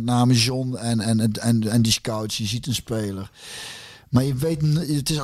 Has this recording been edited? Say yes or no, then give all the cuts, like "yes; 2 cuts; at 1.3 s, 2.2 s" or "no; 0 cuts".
no; 0 cuts